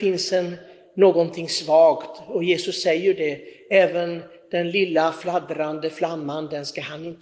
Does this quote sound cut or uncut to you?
uncut